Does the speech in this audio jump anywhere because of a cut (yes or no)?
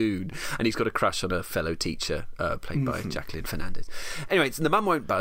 no